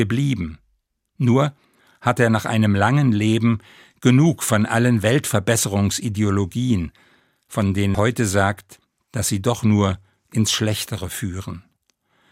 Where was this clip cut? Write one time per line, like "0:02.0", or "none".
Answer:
0:07.9